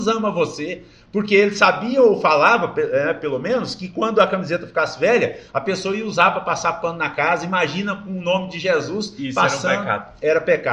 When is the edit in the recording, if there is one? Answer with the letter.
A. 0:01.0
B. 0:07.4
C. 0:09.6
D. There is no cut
D